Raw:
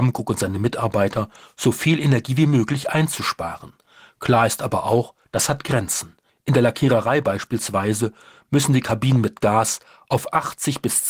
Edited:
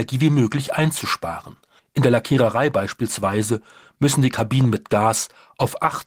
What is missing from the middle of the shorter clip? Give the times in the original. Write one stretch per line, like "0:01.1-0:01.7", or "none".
0:04.0-0:06.3